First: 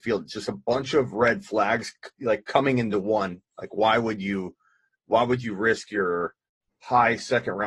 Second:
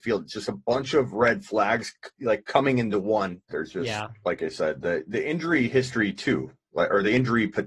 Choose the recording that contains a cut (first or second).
second